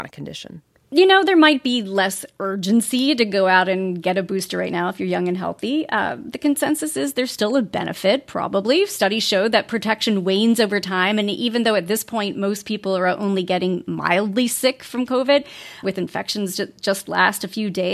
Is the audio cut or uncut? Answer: cut